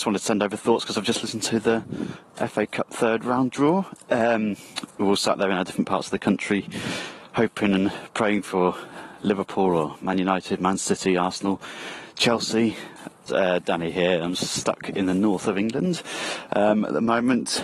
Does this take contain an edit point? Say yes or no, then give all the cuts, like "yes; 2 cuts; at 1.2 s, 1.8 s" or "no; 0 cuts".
yes; 1 cut; at 13.3 s